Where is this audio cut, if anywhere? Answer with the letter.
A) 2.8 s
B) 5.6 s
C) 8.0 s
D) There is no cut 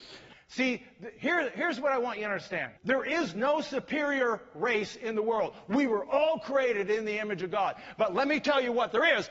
A